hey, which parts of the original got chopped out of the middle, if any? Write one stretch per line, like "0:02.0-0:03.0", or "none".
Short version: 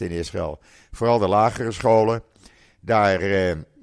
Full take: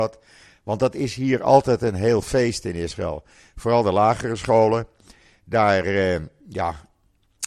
none

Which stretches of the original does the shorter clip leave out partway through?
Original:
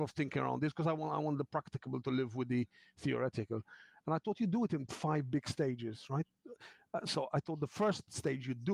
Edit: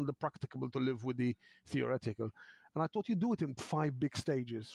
none

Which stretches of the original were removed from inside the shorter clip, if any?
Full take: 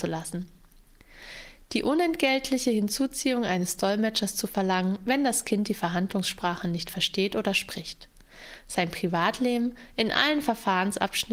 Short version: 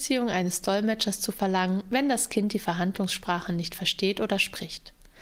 none

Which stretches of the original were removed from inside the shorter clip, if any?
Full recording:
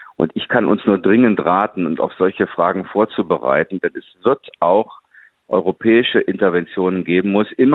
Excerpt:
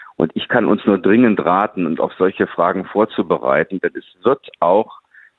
none

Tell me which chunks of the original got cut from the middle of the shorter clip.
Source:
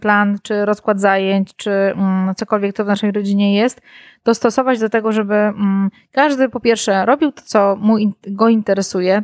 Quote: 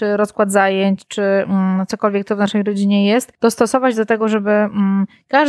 0:03.8-0:04.2

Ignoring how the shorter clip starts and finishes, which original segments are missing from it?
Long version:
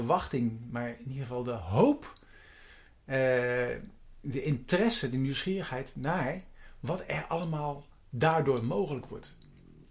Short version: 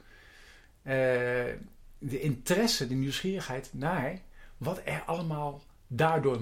none

